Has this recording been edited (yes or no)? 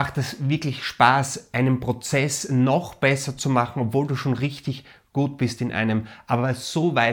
no